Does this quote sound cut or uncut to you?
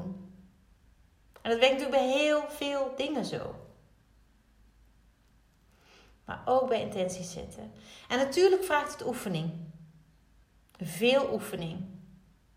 uncut